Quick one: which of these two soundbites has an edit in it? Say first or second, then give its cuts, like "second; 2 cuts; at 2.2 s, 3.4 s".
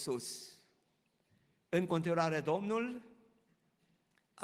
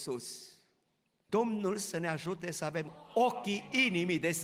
second; 1 cut; at 1.3 s